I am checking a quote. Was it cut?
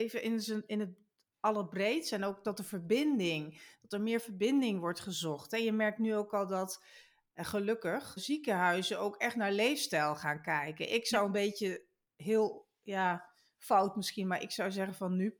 yes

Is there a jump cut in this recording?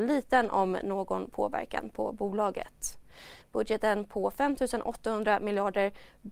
yes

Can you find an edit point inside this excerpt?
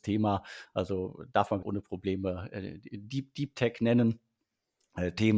yes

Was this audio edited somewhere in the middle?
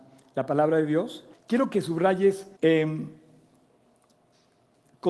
yes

